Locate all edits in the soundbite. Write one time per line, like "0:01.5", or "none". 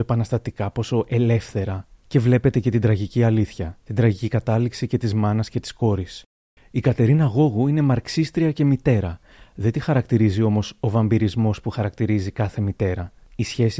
0:06.6